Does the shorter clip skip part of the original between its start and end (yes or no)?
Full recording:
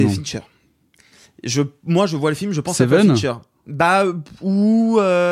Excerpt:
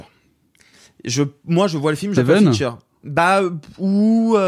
yes